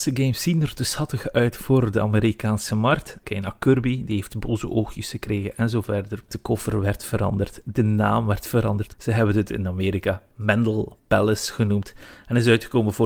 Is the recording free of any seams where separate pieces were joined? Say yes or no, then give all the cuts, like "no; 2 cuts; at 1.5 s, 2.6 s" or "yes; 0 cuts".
no; 3 cuts; at 3.2 s, 6.3 s, 8.9 s